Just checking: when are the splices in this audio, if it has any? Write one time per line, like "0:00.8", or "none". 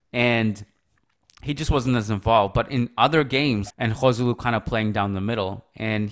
0:03.7